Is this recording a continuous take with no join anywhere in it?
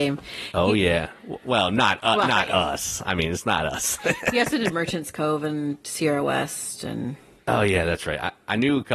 yes; 0 cuts

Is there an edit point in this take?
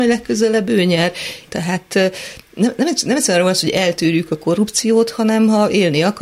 yes; 1 cut; at 1.5 s

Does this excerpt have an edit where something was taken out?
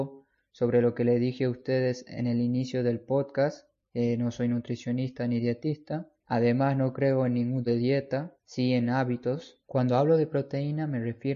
yes; 2 cuts; at 7.7 s, 9.6 s

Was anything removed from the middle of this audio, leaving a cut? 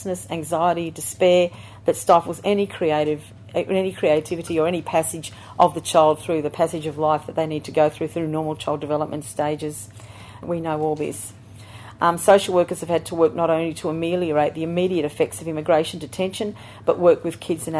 yes; 1 cut; at 10.4 s

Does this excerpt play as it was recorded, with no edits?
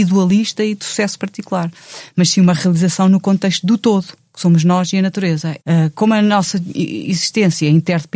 no; 1 cut; at 5.6 s

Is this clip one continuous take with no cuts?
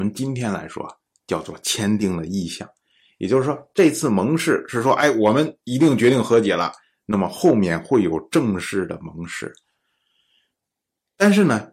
yes; 0 cuts

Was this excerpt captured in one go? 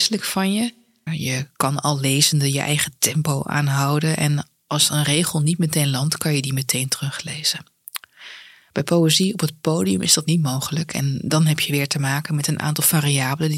no; 1 cut; at 1.1 s

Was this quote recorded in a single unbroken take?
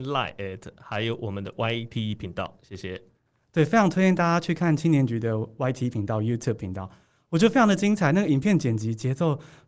yes; 0 cuts

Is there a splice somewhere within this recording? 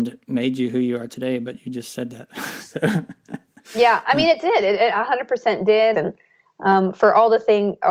yes; 1 cut; at 5.9 s

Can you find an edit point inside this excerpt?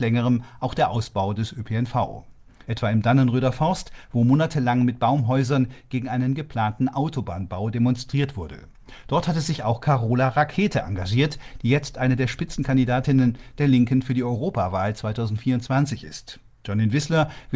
yes; 1 cut; at 2.7 s

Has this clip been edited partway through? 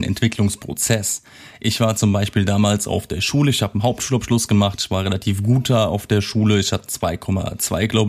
no; 0 cuts

